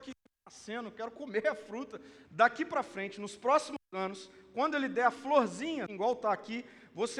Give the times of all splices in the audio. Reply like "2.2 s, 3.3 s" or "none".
2.2 s, 5.9 s